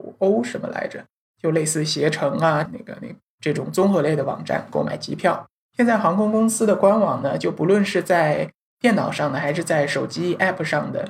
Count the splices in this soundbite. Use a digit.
2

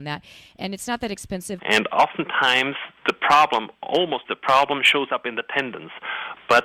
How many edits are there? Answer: 2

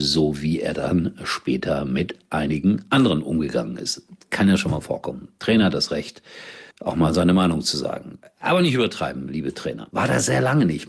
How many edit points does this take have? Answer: 2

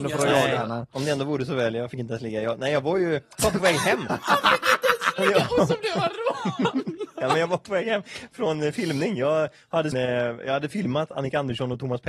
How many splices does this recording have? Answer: 1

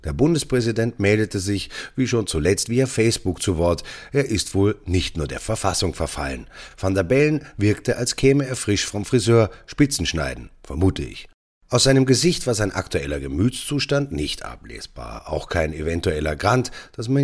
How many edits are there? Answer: 0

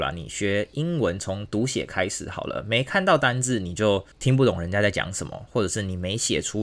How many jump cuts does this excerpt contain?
1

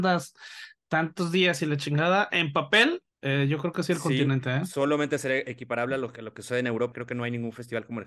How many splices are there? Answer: 2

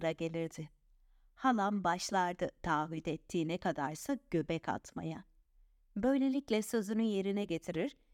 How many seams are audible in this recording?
0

